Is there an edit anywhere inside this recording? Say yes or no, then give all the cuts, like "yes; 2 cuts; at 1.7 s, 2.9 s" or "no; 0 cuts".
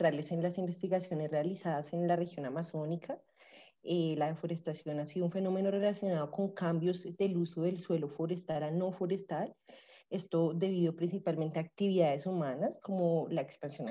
no; 0 cuts